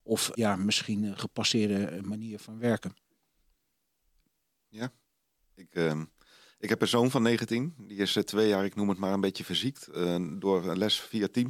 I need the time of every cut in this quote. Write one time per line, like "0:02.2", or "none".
none